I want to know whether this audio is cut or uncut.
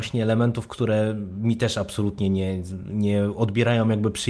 uncut